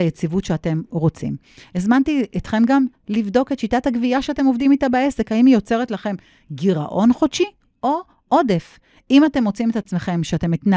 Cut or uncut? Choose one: uncut